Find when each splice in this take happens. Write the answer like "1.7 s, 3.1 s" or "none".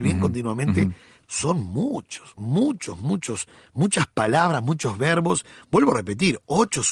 1.2 s